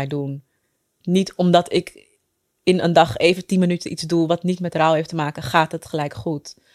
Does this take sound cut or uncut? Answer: cut